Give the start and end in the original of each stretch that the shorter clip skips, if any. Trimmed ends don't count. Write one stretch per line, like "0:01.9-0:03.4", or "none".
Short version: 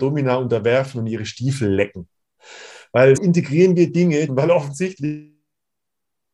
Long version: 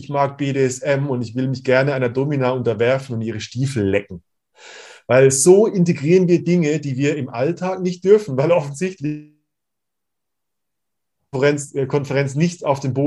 0:05.3-0:05.7
0:06.8-0:08.3